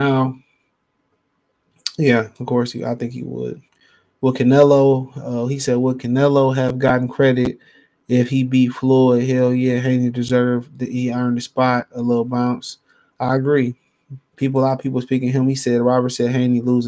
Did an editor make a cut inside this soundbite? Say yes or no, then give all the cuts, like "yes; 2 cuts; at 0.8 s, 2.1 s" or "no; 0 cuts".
no; 0 cuts